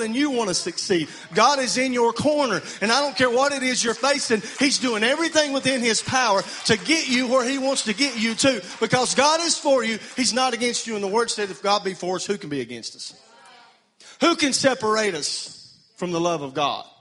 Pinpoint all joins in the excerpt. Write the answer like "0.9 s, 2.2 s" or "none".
none